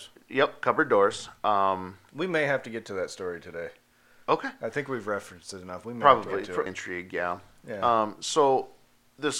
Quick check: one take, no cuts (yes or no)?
no